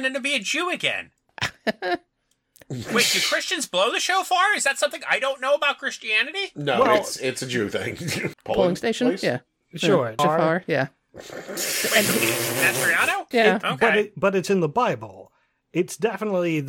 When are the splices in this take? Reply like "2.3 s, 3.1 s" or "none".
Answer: 8.3 s, 10.2 s, 13.3 s

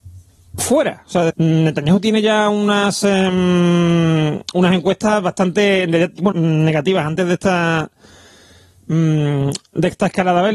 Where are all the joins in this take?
1.3 s, 6.3 s

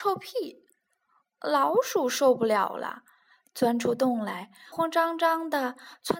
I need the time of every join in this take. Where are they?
4.7 s

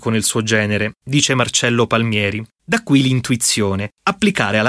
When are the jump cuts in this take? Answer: none

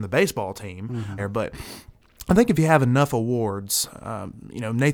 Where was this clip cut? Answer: 1.2 s

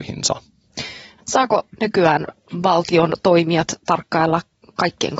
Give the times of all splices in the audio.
1.2 s

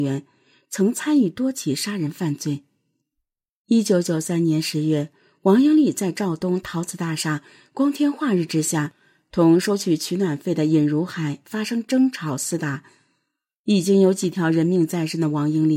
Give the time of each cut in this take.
none

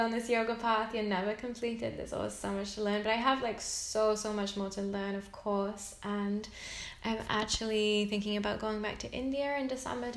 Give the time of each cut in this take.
none

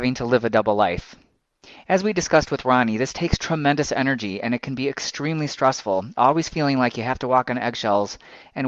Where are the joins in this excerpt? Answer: none

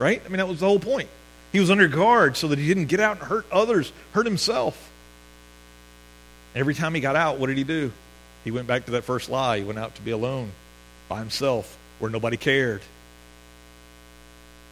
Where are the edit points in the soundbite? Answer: none

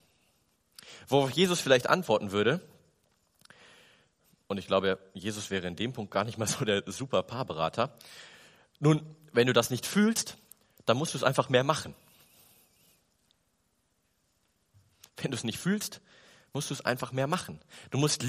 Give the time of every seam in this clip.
none

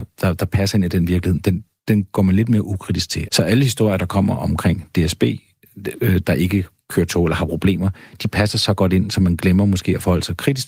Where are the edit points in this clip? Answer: 3.3 s

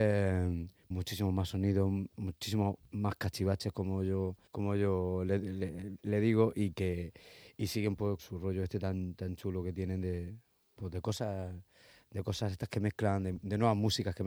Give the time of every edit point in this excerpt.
0.9 s, 4.5 s, 8.2 s

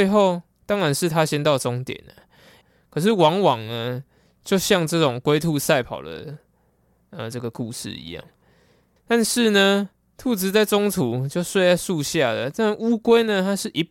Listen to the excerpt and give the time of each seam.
2.6 s, 9.0 s

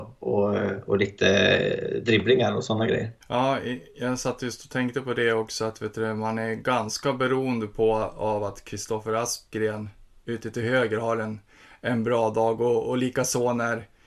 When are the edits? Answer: 3.2 s

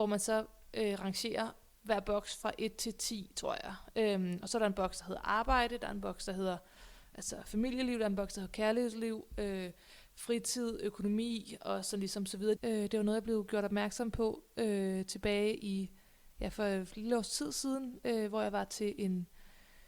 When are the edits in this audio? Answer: 12.6 s

